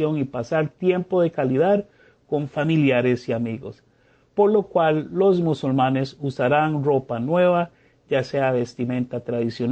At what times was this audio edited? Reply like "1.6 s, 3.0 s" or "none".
none